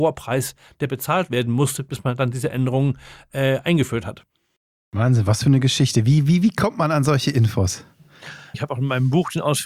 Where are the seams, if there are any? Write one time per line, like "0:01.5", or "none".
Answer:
0:08.5

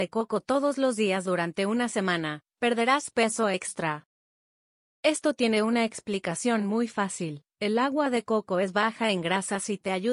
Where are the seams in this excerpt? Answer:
none

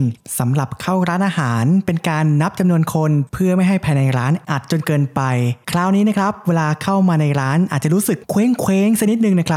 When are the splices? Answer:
0:04.5

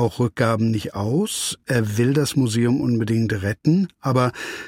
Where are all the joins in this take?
none

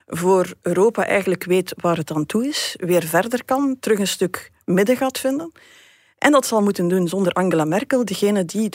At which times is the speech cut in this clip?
none

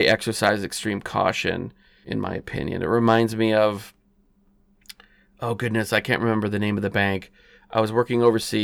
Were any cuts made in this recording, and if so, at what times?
0:02.0

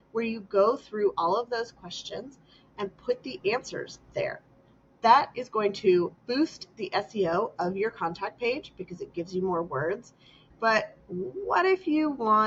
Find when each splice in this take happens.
none

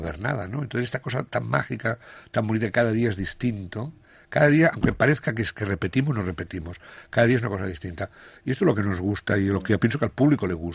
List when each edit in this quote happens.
none

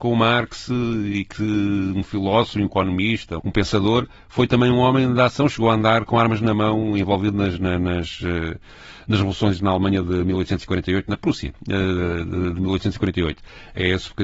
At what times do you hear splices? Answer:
0:03.4

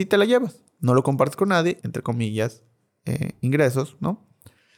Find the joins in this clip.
0:01.8

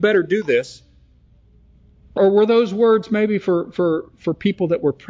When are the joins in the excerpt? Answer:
0:02.2

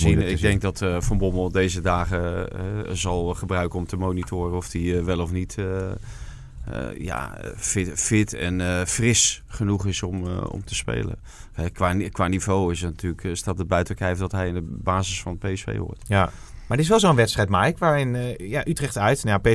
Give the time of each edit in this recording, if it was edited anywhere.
none

